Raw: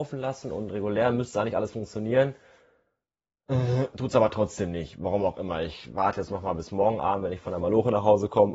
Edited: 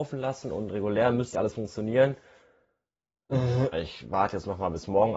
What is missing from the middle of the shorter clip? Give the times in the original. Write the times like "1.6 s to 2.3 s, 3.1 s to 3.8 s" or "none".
1.3 s to 1.5 s, 3.9 s to 5.6 s